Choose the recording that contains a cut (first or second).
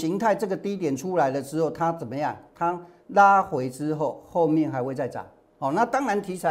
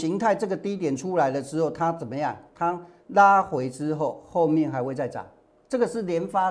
first